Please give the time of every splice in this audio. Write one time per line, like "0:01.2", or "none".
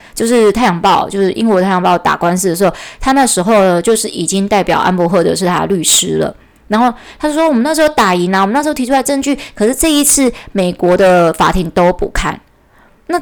none